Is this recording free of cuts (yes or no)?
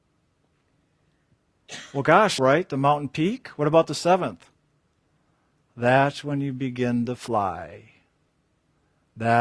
no